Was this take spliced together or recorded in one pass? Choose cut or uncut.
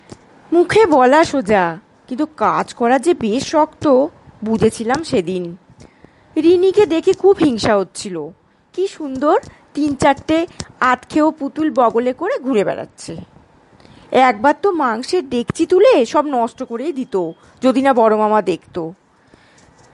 uncut